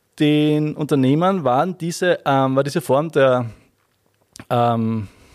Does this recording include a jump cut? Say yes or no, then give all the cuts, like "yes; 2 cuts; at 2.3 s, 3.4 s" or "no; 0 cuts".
no; 0 cuts